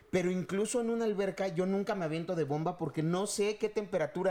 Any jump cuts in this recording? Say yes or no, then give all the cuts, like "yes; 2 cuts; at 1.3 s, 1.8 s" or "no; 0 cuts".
no; 0 cuts